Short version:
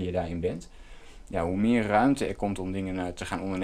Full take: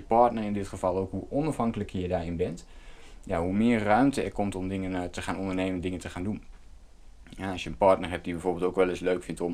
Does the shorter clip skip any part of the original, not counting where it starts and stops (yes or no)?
no